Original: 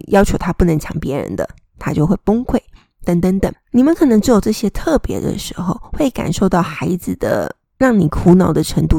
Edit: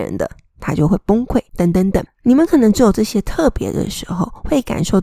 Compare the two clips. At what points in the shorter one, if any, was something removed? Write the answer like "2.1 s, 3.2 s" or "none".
1.5 s